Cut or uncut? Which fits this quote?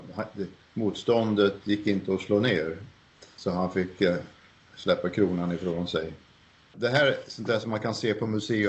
uncut